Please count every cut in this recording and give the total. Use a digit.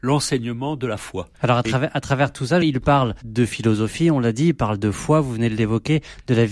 1